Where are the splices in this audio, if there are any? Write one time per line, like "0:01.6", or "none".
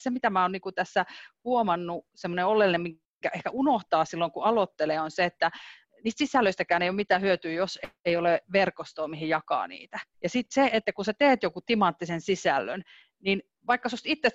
0:10.1